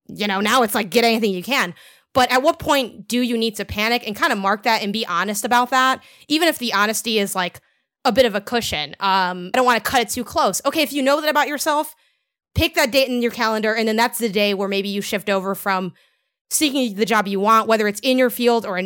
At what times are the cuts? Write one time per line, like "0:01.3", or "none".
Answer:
0:09.5